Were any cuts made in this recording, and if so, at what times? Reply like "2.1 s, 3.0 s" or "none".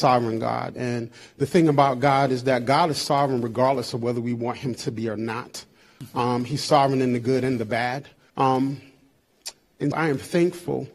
8.3 s, 9.9 s